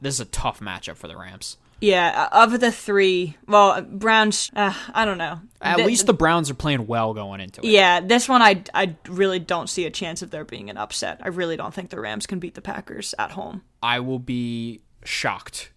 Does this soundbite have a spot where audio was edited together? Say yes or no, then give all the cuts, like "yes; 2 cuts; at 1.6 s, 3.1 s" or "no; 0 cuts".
yes; 1 cut; at 4.5 s